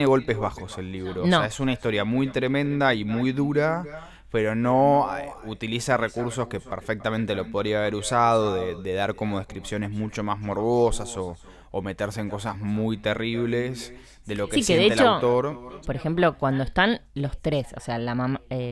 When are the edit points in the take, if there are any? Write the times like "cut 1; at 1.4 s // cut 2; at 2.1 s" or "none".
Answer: cut 1; at 15.8 s